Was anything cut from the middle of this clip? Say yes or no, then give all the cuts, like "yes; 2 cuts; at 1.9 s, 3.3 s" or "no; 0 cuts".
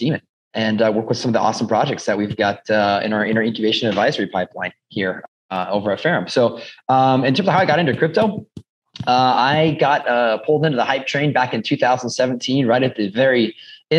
no; 0 cuts